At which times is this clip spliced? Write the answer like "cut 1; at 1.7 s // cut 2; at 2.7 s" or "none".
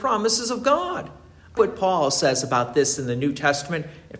cut 1; at 1.6 s